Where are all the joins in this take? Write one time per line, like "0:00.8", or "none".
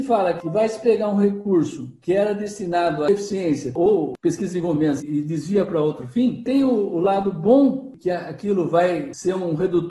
none